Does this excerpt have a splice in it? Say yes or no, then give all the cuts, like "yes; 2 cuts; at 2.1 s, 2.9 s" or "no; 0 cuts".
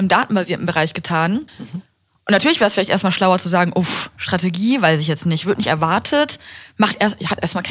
no; 0 cuts